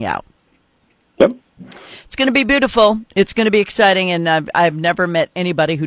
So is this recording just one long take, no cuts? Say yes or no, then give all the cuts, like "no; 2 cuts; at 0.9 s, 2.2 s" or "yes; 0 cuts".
yes; 0 cuts